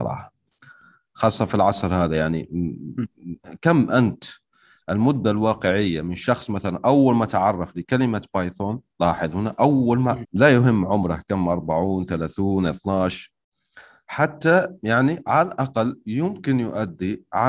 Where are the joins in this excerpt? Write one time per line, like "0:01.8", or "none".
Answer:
0:10.2